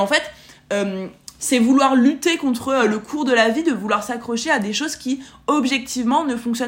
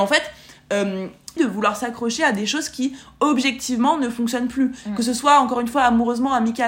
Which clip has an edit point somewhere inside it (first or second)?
second